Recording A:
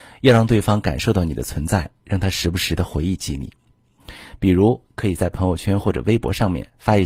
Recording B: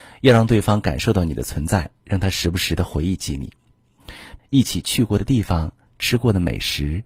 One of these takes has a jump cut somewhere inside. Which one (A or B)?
B